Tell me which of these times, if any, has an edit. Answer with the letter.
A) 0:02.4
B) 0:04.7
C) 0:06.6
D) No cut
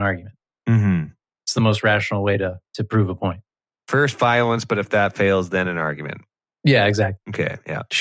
D